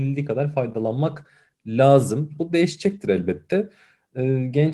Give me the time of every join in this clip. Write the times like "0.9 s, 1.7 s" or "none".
2.4 s